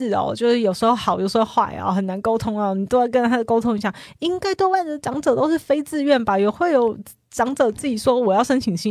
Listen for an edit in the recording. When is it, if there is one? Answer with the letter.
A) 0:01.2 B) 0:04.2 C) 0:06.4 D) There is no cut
D